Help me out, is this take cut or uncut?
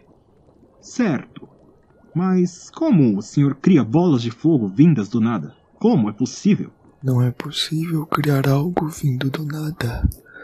uncut